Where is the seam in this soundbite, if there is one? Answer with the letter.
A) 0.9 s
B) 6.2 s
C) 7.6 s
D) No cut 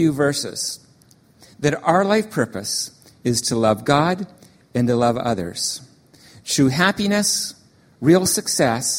D